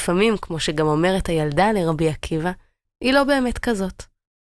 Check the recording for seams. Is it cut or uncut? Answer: cut